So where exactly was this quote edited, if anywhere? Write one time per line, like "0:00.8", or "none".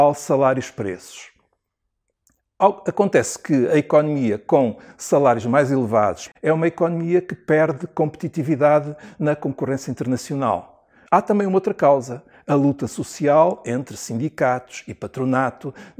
0:06.3
0:11.1